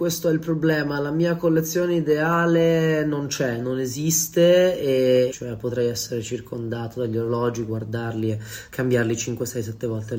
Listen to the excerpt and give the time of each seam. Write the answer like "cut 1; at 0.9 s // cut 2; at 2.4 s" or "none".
cut 1; at 5.3 s